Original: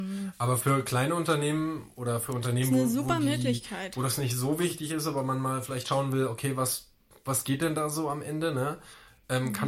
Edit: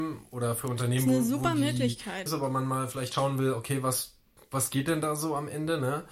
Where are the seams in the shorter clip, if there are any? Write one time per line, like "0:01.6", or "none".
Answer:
0:02.3